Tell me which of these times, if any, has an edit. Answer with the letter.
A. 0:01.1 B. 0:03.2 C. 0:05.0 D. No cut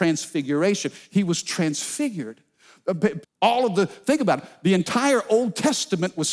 B